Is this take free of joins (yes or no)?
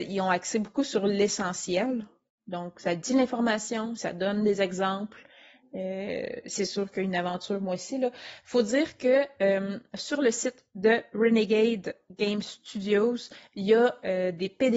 yes